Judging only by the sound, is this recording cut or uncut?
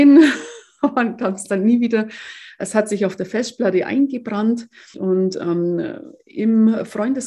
cut